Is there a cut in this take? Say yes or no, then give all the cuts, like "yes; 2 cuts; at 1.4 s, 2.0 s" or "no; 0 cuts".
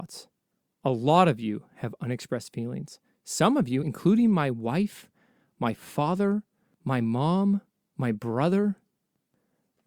no; 0 cuts